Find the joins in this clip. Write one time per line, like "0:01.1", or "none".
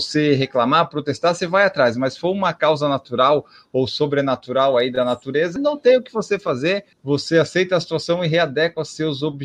0:05.6
0:06.9